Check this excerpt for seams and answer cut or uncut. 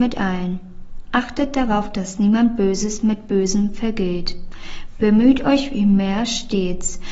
uncut